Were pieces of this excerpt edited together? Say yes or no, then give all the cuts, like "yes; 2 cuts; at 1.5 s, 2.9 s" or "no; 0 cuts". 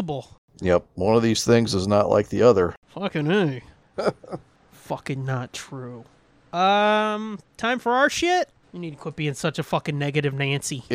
yes; 2 cuts; at 3.9 s, 8.6 s